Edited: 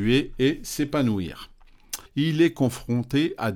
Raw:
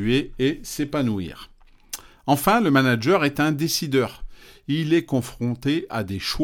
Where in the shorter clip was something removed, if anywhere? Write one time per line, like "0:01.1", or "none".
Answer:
0:02.1